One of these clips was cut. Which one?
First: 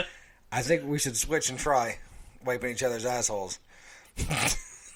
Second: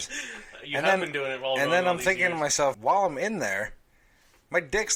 second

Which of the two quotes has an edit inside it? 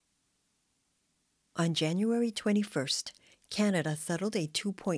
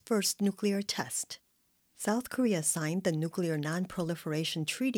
second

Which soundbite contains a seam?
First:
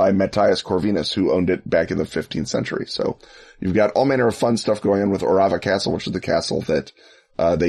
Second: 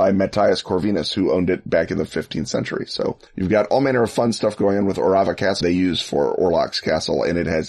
second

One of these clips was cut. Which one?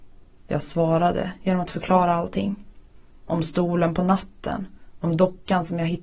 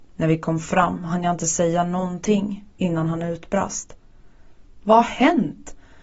second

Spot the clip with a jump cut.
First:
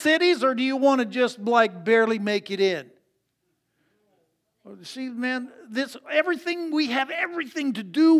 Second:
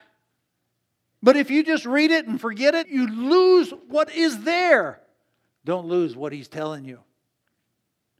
second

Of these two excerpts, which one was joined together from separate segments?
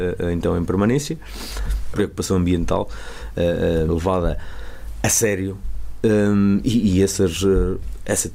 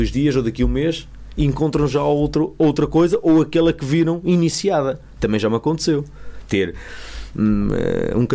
first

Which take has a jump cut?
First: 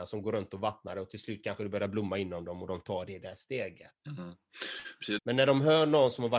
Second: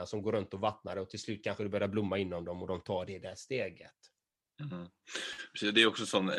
first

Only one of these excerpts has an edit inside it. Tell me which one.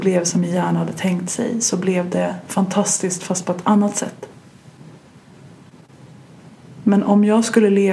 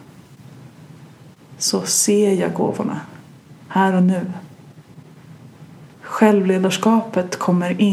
second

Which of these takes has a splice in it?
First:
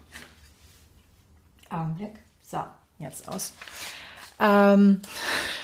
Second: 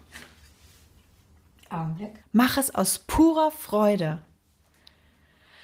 second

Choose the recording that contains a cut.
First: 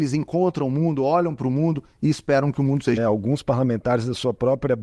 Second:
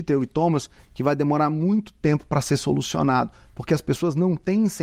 first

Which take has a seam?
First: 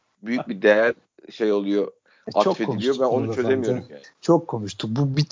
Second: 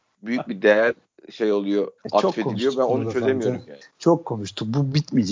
second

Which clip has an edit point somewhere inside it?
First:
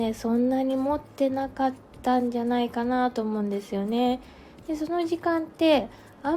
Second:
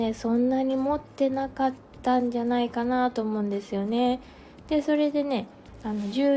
first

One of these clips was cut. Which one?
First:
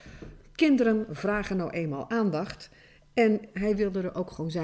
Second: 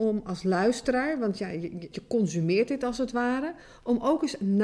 second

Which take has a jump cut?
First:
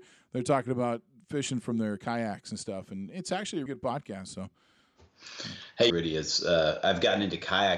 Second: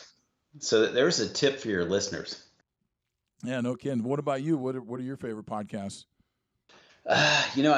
first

